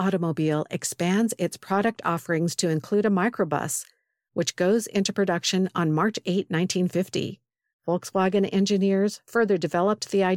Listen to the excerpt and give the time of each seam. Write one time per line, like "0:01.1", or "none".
0:07.7

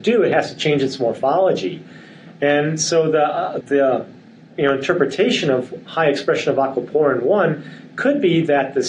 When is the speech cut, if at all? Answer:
0:03.6

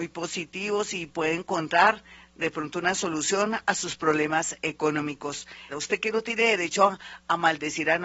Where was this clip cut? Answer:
0:05.7

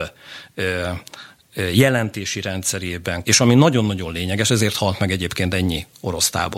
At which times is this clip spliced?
0:03.2

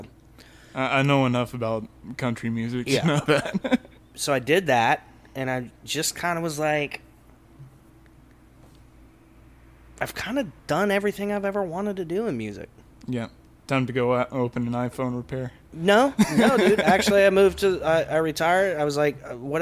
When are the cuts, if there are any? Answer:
0:04.0

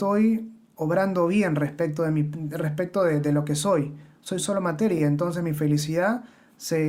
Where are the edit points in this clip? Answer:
none

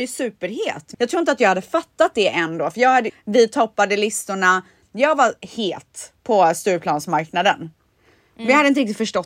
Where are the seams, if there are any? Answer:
0:00.9
0:03.1

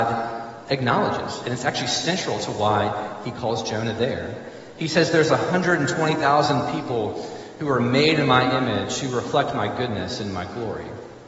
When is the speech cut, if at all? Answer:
none

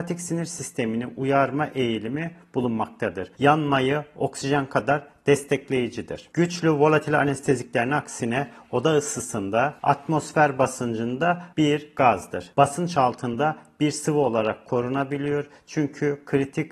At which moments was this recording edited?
0:03.3

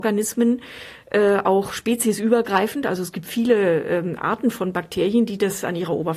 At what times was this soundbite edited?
none

